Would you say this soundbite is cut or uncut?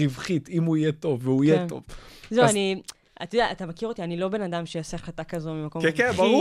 uncut